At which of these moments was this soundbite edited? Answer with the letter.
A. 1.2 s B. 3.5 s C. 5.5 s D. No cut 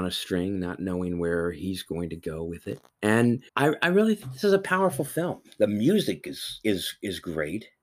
B